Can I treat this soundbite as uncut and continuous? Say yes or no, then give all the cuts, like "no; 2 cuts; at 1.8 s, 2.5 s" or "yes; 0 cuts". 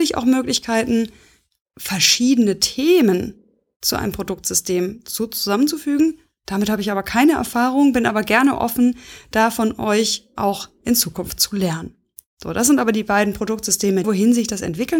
no; 1 cut; at 14.0 s